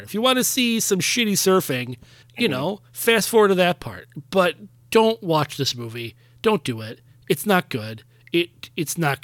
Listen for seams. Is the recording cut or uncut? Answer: cut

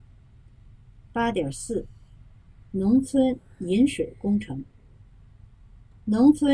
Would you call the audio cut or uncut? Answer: uncut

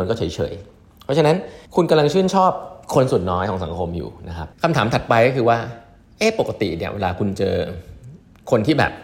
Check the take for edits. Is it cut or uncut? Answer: cut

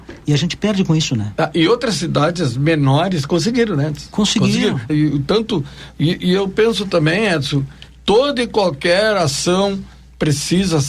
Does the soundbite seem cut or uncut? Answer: cut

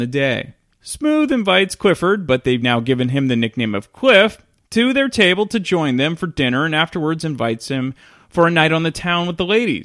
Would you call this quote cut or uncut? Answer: uncut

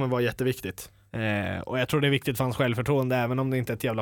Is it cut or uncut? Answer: cut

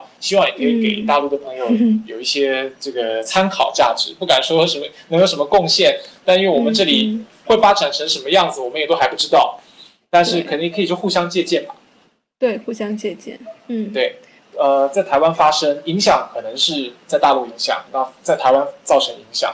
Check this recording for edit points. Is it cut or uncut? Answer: cut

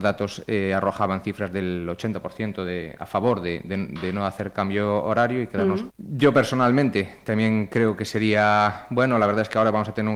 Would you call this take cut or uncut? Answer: cut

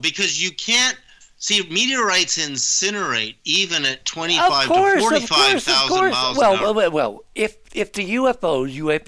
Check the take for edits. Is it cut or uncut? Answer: uncut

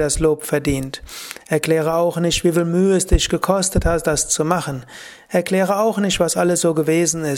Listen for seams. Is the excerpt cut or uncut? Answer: uncut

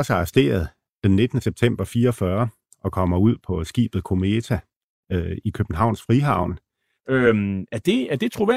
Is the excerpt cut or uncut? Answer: cut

